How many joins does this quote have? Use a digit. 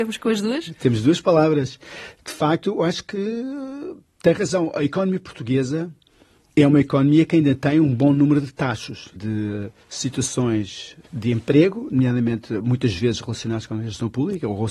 2